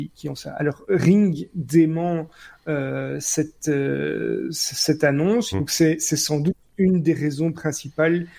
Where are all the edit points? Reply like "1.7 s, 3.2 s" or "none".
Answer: 5.5 s